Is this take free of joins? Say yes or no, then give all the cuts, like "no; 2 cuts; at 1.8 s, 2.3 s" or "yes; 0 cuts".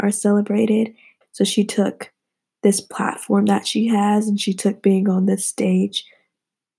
no; 1 cut; at 1.2 s